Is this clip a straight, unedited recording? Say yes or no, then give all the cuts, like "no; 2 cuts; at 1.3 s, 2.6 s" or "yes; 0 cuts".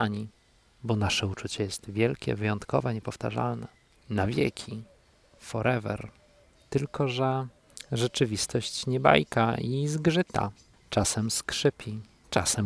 no; 1 cut; at 3.9 s